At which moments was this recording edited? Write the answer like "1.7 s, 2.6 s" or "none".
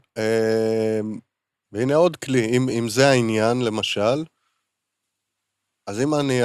1.7 s, 2.7 s